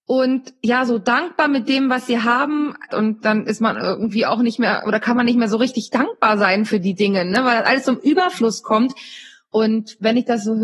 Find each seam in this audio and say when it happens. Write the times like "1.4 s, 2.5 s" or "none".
2.9 s